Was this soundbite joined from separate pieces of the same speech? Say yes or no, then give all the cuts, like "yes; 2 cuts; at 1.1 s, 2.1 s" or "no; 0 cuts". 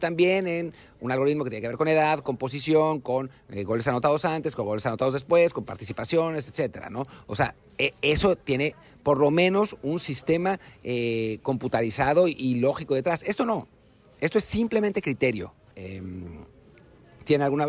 yes; 1 cut; at 15.7 s